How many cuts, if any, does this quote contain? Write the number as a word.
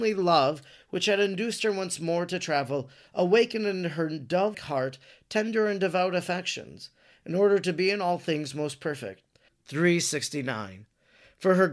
two